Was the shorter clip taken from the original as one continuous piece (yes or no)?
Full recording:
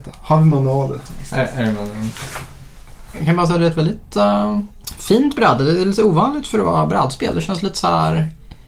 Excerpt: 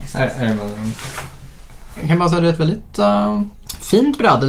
yes